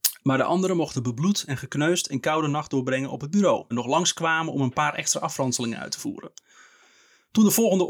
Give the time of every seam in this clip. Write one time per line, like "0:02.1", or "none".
0:03.7